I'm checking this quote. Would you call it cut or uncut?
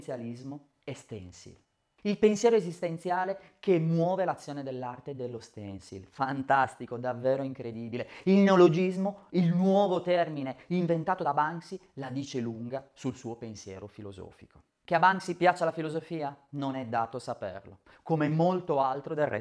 uncut